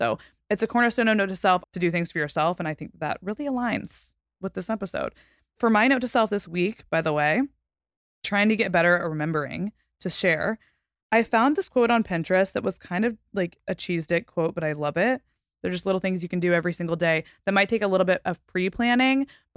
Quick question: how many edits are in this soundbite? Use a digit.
2